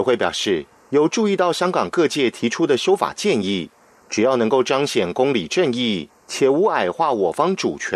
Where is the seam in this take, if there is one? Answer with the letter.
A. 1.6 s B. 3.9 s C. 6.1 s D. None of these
C